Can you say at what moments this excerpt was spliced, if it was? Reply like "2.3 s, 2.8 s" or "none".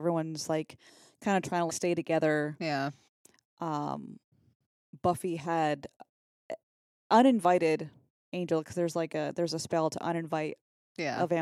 1.7 s